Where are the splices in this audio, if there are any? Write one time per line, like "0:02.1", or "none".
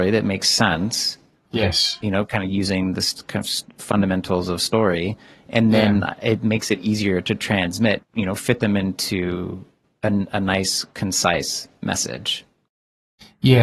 0:08.0